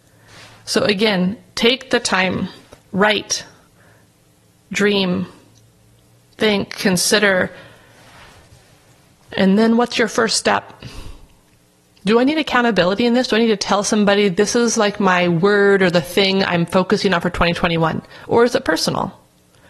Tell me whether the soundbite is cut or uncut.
uncut